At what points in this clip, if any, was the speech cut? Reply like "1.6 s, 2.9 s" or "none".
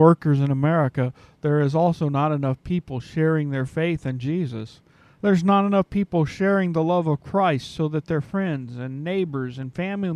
none